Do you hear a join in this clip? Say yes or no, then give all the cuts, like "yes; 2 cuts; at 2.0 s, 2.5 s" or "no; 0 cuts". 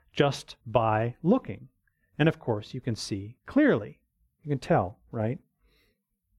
no; 0 cuts